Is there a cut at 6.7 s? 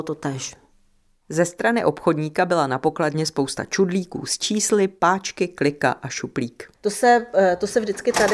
yes; 1 cut; at 6.7 s

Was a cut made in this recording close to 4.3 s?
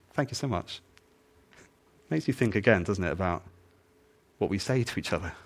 no; 1 cut; at 2.0 s

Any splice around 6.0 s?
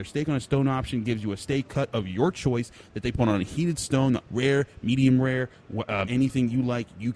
yes; 2 cuts; at 4.2 s, 6.0 s

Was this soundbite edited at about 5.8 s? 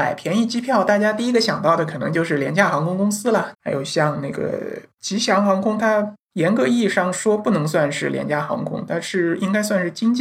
no; 1 cut; at 3.5 s

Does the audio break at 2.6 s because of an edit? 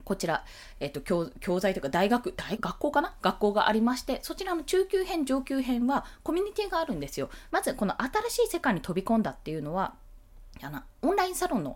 yes; 2 cuts; at 2.6 s, 7.5 s

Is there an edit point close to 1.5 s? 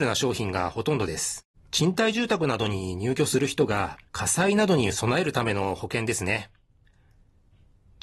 yes; 2 cuts; at 1.5 s, 4.1 s

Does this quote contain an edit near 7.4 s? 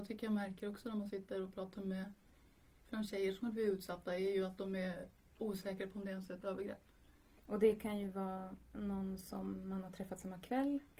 yes; 1 cut; at 7.4 s

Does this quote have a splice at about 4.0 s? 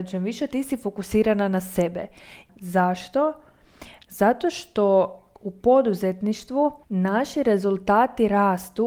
no; 2 cuts; at 2.5 s, 6.8 s

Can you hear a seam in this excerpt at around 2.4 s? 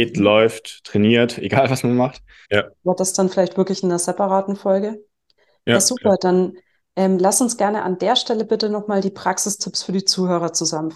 yes; 1 cut; at 2.4 s

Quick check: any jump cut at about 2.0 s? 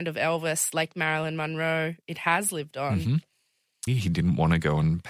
no; 1 cut; at 3.9 s

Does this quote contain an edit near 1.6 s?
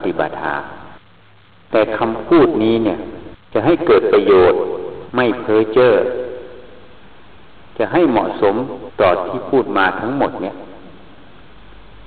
no; 1 cut; at 3.4 s

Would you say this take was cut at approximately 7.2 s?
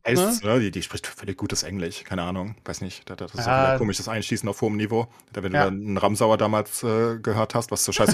no; 0 cuts

